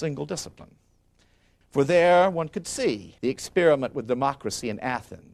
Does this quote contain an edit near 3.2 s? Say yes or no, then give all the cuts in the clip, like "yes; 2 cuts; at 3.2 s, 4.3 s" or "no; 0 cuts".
yes; 2 cuts; at 1.6 s, 3.2 s